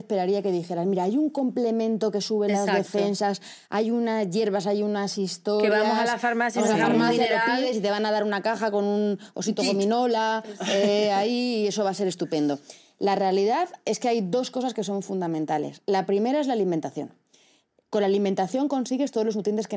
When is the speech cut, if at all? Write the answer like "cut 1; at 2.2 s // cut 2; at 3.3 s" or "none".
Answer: none